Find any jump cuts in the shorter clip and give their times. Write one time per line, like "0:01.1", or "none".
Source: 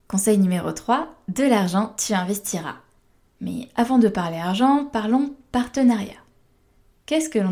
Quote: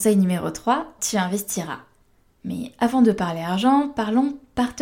0:01.0